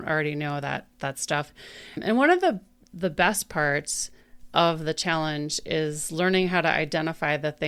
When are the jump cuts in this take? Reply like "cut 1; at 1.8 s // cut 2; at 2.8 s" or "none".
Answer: none